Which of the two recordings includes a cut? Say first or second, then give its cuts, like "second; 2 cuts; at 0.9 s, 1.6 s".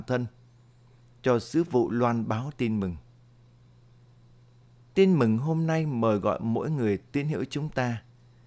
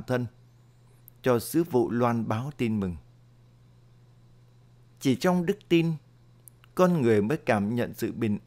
first; 1 cut; at 4.8 s